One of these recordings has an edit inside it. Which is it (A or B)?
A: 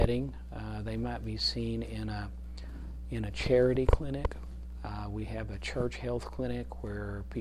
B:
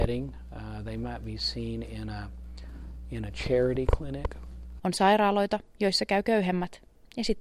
B